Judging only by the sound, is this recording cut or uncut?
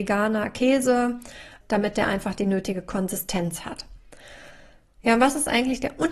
cut